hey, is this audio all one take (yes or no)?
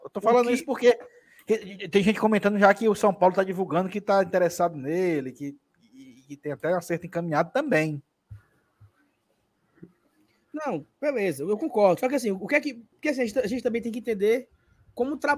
no